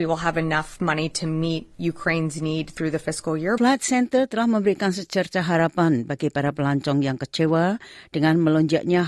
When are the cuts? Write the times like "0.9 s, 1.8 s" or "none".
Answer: 3.6 s